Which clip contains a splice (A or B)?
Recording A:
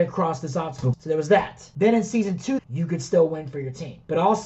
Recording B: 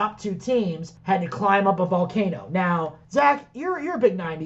A